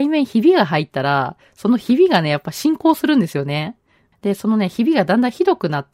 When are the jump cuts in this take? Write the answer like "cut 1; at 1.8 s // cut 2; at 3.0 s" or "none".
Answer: cut 1; at 4.1 s